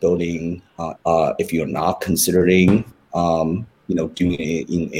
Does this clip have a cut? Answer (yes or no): yes